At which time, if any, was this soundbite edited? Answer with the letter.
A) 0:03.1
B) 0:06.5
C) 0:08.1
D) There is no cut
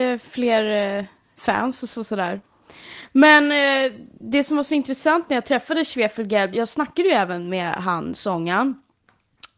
B